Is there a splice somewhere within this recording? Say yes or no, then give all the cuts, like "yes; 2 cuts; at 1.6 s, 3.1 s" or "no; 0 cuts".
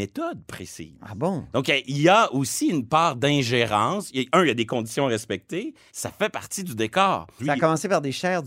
yes; 2 cuts; at 5.9 s, 7.4 s